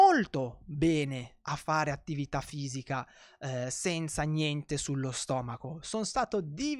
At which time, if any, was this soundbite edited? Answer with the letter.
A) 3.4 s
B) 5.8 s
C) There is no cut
C